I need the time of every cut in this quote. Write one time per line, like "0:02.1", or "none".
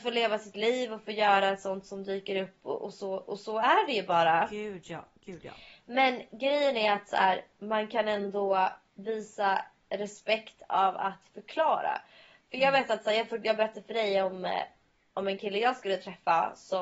none